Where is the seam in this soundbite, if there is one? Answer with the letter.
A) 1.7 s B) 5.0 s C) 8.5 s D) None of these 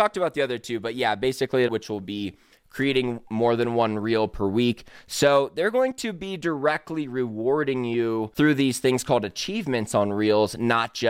A